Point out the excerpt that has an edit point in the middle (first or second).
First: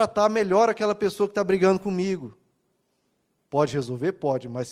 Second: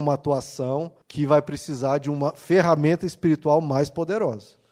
second